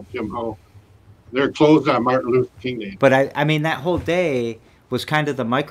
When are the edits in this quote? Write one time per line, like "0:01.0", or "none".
0:01.3
0:03.0